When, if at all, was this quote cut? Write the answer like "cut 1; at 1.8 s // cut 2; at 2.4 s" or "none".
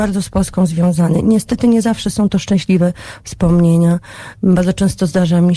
none